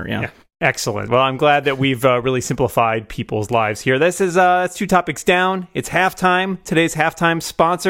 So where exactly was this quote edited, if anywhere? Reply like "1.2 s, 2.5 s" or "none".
none